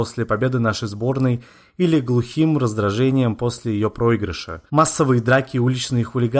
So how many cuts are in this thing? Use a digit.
1